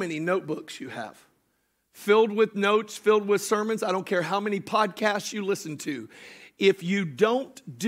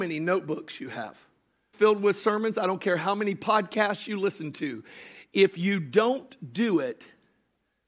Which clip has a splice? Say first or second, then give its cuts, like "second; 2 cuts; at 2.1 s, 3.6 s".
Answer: second; 1 cut; at 1.7 s